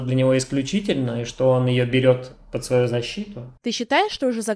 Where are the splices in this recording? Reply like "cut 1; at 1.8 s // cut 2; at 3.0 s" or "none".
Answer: cut 1; at 3.6 s